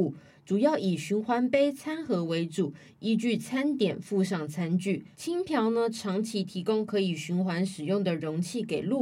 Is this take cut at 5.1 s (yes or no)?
yes